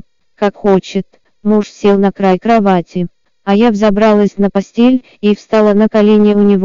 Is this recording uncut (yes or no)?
yes